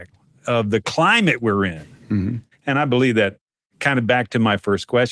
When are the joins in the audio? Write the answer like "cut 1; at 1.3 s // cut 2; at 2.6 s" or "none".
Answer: cut 1; at 2.5 s